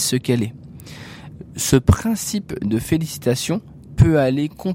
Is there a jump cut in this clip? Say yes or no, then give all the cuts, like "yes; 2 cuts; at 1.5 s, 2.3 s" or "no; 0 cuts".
no; 0 cuts